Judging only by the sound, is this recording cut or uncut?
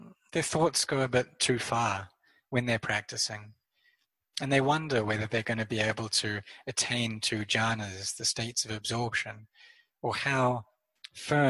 uncut